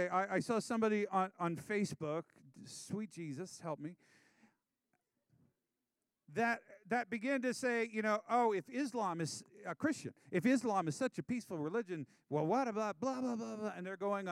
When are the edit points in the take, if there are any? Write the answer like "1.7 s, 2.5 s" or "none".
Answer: none